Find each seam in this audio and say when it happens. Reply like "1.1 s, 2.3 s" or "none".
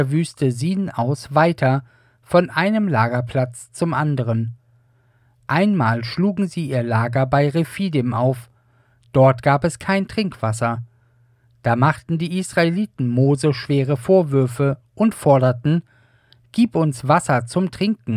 none